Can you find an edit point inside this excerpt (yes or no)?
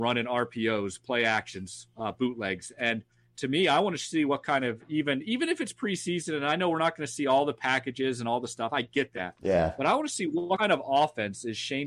no